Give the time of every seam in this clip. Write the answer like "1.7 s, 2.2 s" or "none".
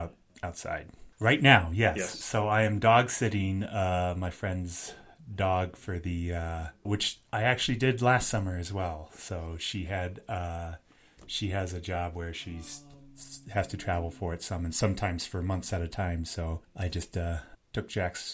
1.1 s, 6.8 s